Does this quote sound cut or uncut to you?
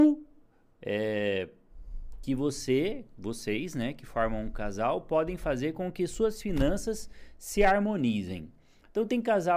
cut